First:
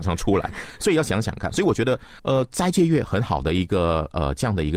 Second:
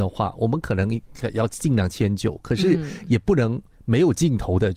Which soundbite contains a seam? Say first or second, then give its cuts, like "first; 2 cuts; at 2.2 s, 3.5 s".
first; 1 cut; at 2.2 s